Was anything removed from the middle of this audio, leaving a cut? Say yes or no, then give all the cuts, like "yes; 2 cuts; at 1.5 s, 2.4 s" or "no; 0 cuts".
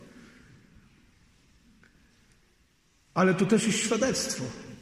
no; 0 cuts